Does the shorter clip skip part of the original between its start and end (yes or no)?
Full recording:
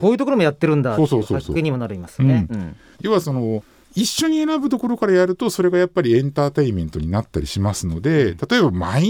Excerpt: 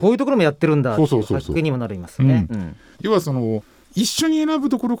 no